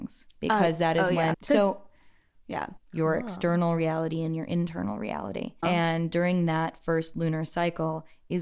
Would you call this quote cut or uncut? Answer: cut